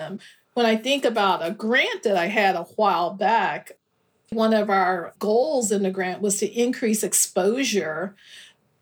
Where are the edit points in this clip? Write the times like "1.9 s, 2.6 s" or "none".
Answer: 4.3 s